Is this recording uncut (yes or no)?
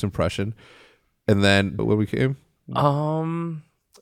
no